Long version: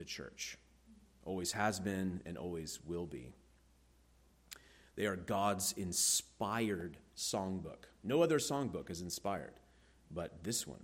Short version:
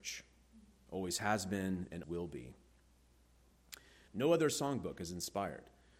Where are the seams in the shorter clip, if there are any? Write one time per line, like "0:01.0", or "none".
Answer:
0:02.0
0:04.1